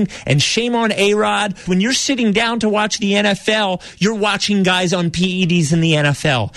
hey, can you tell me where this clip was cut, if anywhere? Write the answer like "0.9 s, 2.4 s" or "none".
1.7 s